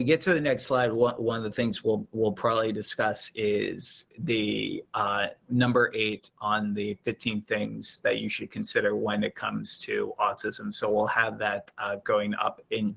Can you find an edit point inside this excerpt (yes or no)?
no